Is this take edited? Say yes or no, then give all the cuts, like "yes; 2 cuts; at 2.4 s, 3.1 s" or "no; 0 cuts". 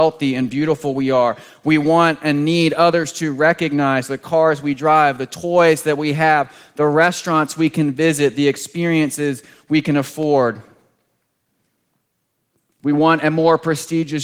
no; 0 cuts